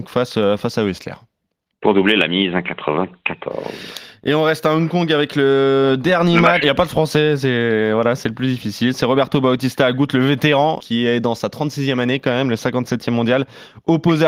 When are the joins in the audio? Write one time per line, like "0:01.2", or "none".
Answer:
0:06.6
0:10.8

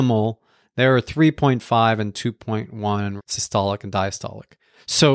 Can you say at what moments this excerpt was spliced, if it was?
0:03.2

